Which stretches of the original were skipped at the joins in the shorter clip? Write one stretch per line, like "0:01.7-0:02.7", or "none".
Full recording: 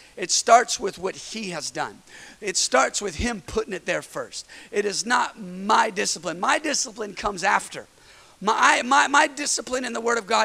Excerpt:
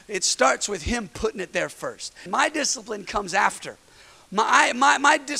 0:04.6-0:06.4